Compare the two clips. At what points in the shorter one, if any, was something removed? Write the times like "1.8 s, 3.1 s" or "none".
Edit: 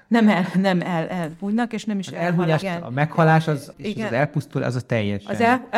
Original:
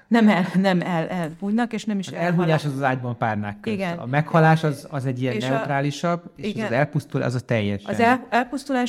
2.6 s, 3.7 s